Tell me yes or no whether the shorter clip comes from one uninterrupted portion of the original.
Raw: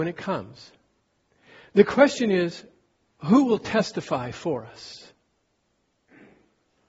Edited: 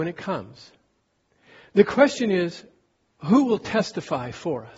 yes